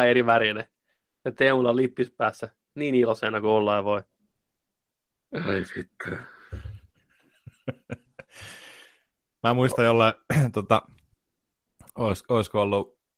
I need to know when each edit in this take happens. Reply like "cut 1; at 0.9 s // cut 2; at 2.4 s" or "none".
none